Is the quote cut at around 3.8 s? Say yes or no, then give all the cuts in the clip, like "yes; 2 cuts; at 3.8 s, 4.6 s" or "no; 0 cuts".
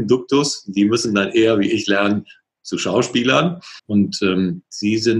yes; 1 cut; at 3.8 s